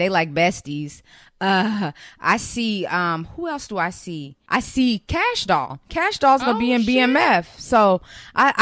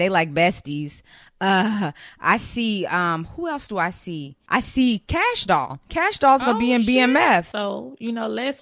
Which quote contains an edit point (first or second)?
second